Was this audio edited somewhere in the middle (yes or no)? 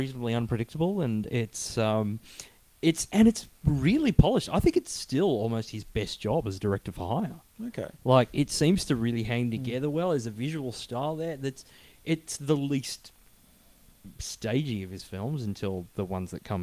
no